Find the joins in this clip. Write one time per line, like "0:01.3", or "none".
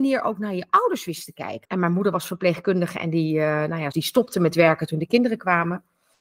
0:01.7
0:03.9